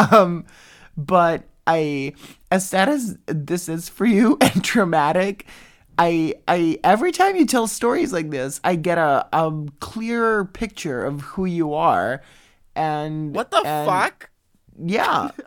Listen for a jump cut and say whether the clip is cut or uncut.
uncut